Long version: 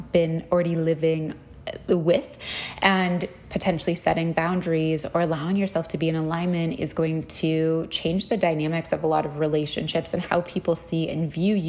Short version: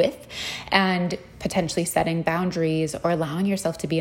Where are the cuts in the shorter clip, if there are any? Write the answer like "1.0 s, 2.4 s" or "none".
none

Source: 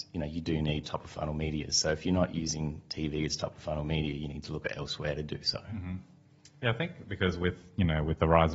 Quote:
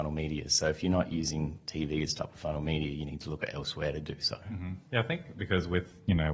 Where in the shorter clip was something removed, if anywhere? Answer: 4.9 s

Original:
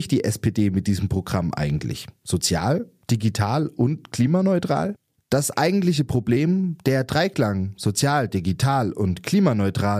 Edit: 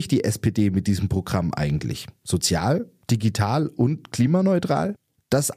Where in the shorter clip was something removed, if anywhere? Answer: none

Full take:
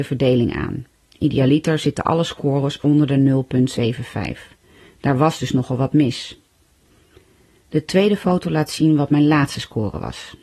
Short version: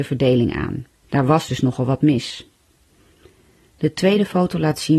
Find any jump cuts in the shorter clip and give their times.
1.0 s

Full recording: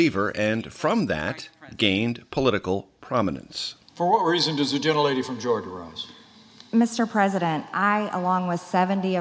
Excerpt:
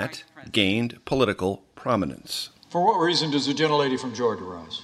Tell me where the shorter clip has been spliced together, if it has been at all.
none

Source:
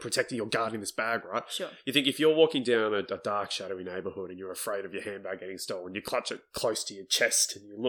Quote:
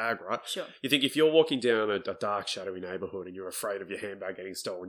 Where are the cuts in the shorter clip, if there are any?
none

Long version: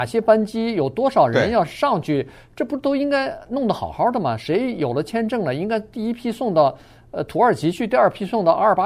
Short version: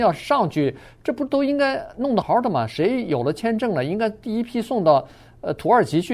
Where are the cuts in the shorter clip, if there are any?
2.2 s

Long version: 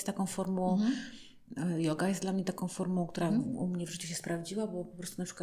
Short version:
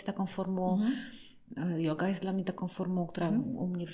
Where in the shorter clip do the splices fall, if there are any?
none

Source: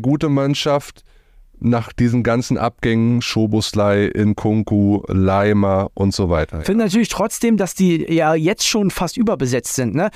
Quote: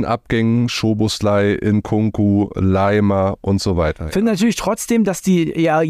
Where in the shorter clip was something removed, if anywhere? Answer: none

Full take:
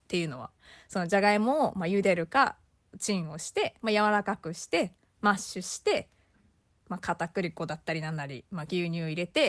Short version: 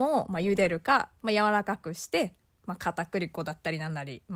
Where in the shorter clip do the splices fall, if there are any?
1.2 s, 2.4 s

